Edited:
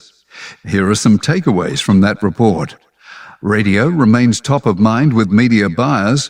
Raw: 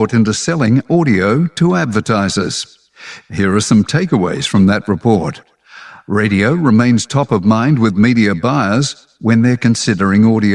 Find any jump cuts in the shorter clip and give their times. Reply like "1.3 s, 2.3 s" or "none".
none